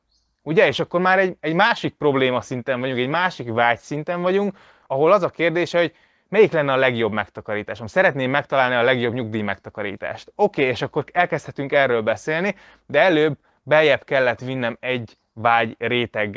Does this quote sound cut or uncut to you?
cut